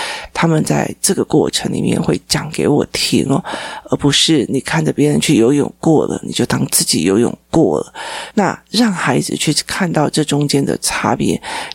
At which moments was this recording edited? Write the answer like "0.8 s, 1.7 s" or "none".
8.3 s